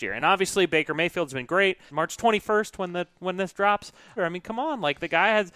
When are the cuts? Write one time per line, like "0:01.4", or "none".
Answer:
0:01.9
0:04.2